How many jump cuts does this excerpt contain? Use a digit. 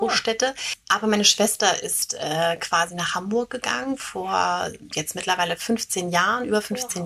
0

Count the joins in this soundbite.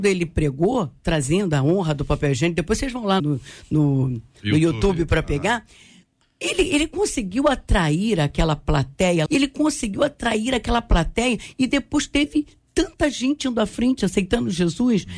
2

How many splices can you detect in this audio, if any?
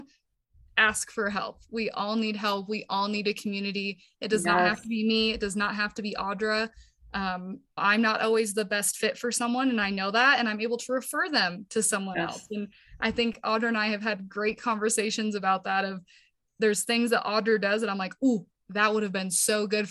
1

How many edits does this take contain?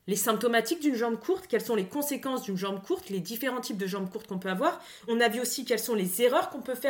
0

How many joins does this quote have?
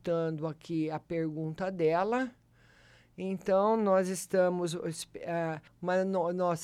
1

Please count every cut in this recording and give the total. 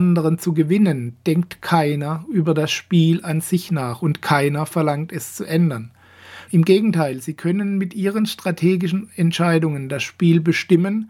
1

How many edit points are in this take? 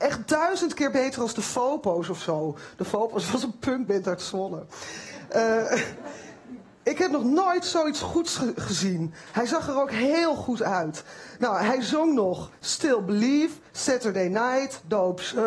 0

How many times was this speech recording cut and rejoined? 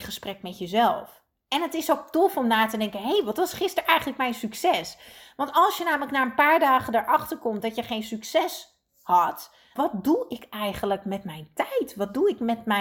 1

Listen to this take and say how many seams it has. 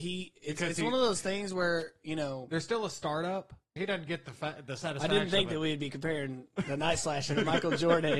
1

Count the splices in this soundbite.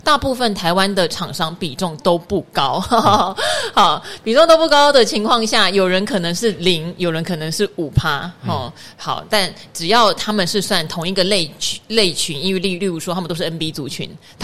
0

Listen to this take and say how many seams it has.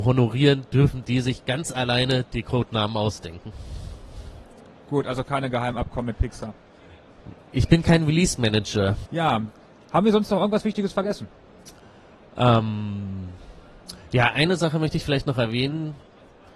1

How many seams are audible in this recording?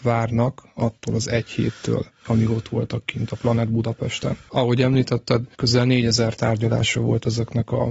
0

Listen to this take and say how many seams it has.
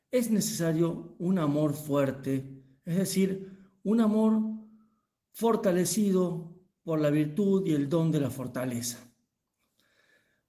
0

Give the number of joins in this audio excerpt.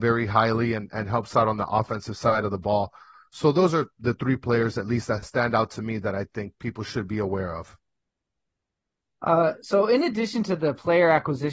0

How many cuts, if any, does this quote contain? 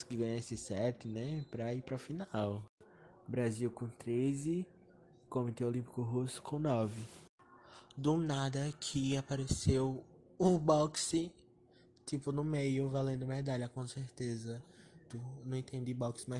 1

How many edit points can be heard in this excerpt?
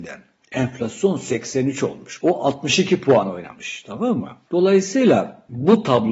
1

